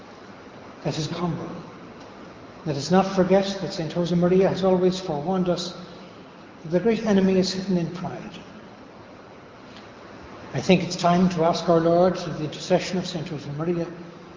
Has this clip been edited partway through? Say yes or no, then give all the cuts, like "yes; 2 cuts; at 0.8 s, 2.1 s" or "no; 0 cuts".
yes; 1 cut; at 1.1 s